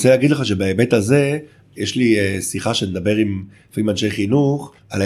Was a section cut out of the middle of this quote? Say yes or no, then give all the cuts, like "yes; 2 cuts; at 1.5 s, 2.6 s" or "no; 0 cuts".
no; 0 cuts